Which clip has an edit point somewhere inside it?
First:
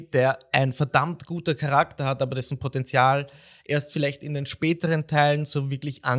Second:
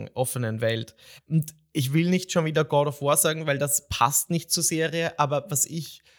second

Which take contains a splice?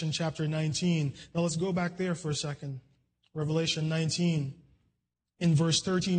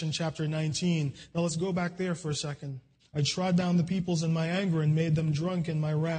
second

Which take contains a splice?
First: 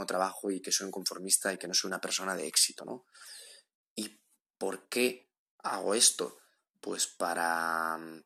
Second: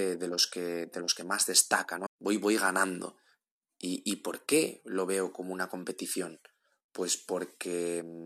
second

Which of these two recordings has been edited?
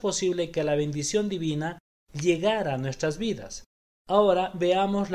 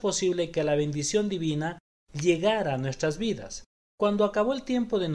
second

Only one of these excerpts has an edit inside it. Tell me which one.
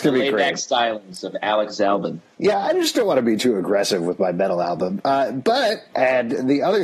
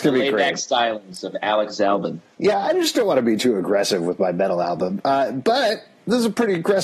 first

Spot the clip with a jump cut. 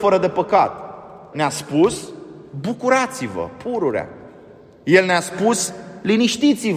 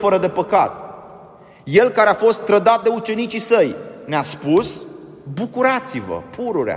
first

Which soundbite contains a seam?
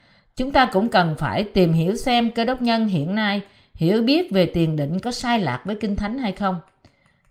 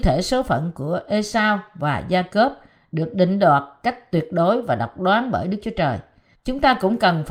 second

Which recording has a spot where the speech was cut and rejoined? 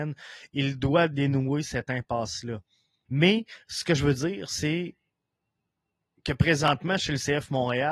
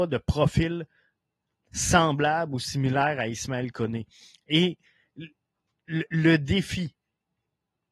first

